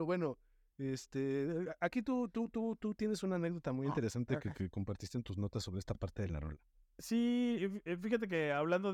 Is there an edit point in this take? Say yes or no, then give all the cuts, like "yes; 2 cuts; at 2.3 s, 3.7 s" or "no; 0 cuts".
no; 0 cuts